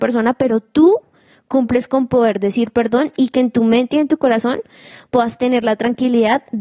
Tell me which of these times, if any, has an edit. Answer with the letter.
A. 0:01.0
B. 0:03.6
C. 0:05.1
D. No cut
D